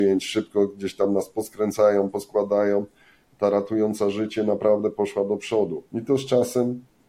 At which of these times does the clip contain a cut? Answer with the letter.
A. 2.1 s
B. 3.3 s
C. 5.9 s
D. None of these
C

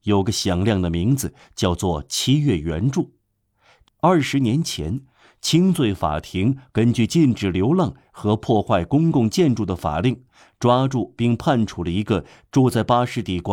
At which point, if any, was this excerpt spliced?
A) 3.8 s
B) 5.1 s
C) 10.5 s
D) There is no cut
A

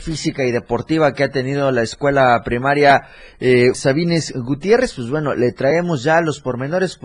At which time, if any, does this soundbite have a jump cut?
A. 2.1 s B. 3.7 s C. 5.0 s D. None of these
B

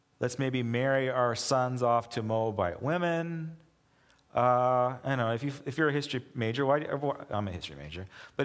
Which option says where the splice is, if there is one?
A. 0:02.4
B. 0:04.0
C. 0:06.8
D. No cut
D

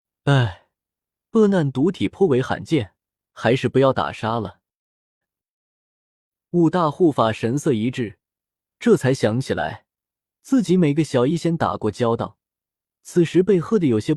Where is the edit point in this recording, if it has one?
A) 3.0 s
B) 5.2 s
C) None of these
B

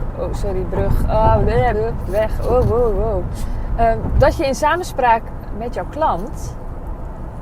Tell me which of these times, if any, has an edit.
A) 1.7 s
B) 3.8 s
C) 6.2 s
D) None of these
A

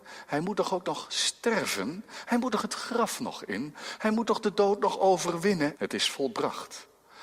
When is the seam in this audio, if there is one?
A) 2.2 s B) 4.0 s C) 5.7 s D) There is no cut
C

